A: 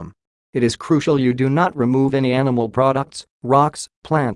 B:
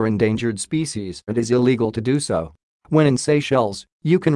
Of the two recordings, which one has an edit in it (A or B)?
B